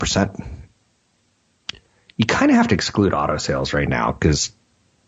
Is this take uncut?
yes; 0 cuts

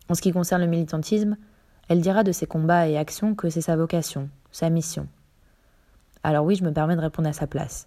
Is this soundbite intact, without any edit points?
yes; 0 cuts

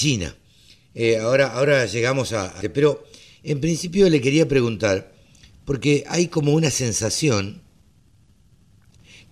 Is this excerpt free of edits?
no; 1 cut; at 2.6 s

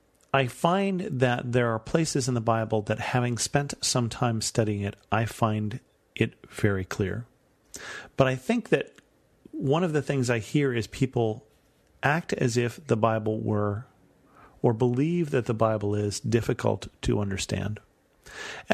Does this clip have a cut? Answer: no; 0 cuts

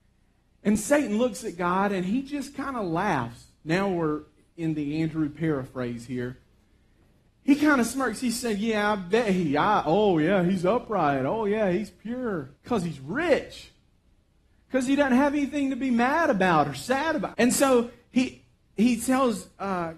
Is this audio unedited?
no; 2 cuts; at 12.5 s, 17.3 s

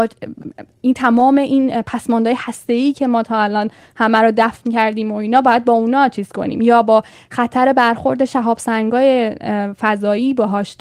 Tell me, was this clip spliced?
no; 0 cuts

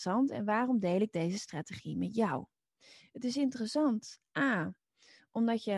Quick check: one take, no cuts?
yes; 0 cuts

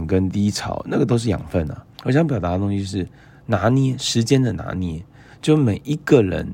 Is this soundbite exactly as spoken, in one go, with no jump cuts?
no; 1 cut; at 2.0 s

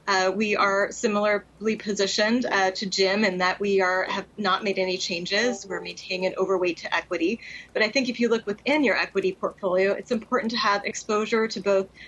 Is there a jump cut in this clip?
no; 0 cuts

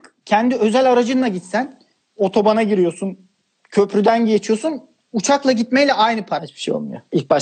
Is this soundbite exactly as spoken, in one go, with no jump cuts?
no; 1 cut; at 6.4 s

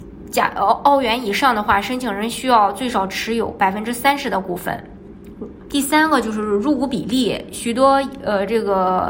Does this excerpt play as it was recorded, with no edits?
no; 1 cut; at 5.7 s

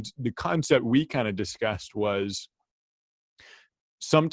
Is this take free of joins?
yes; 0 cuts

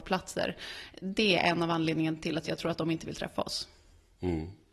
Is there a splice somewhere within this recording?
no; 0 cuts

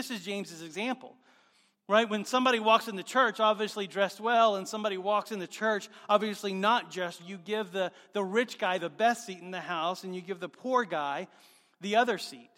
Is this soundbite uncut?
no; 1 cut; at 7.2 s

